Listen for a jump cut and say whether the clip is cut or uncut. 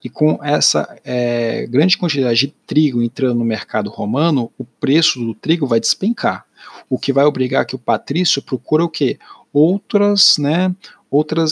uncut